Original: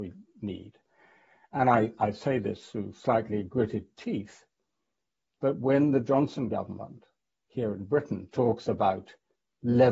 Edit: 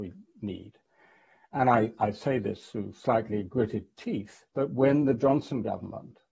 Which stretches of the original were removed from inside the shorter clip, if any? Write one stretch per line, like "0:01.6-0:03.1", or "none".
0:04.5-0:05.3